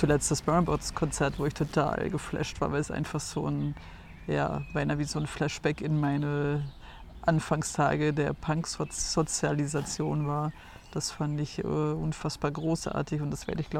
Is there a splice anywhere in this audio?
no; 0 cuts

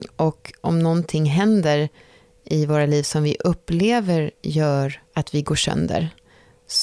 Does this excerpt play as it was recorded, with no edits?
no; 1 cut; at 5.1 s

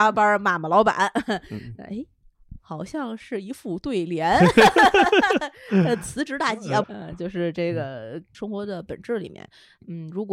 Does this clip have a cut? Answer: yes; 2 cuts; at 6.8 s, 8.3 s

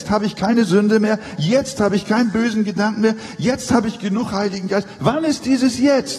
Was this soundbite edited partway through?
no; 0 cuts

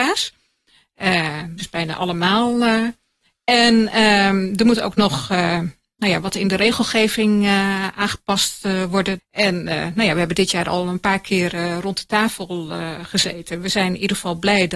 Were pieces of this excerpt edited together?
yes; 2 cuts; at 1.6 s, 9.2 s

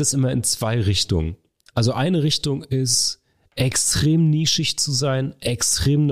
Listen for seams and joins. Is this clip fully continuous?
yes; 0 cuts

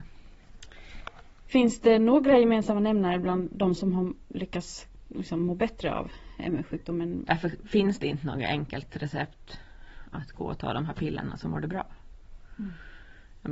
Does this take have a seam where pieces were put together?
yes; 2 cuts; at 1.4 s, 7.3 s

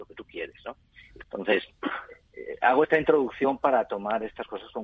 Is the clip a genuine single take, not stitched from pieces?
no; 1 cut; at 1.2 s

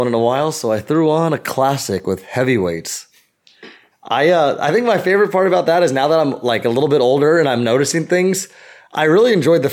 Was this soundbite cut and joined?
yes; 1 cut; at 3.9 s

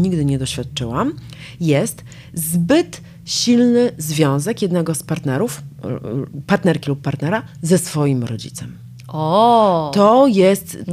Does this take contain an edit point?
no; 0 cuts

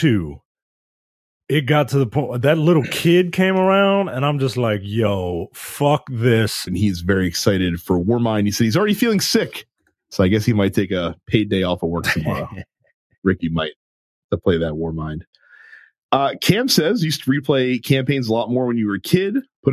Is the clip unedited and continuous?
no; 1 cut; at 6.7 s

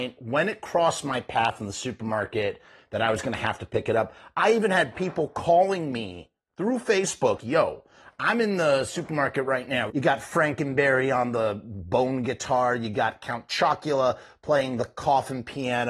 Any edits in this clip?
yes; 2 cuts; at 7.4 s, 9.9 s

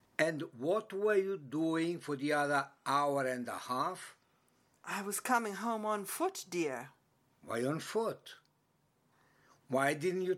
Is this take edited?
no; 0 cuts

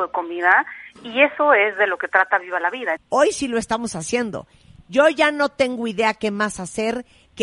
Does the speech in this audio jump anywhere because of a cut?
yes; 1 cut; at 3.0 s

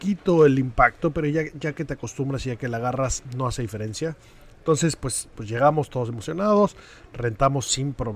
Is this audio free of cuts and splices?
yes; 0 cuts

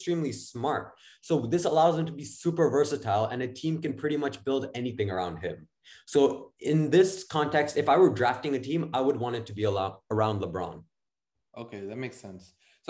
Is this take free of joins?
yes; 0 cuts

